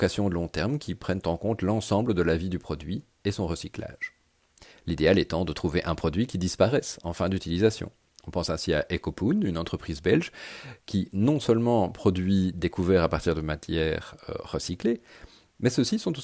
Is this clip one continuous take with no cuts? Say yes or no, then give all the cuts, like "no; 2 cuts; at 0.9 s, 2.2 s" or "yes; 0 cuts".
yes; 0 cuts